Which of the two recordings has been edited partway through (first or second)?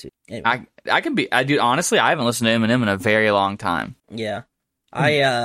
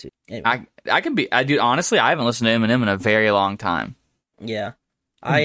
first